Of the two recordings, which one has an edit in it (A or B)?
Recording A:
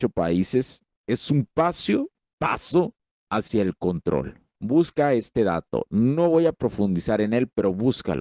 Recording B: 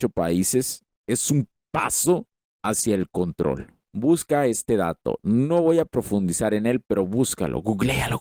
B